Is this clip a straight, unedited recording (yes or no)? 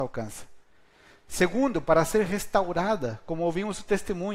yes